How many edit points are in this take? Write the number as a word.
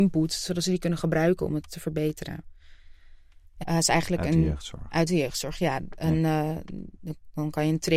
one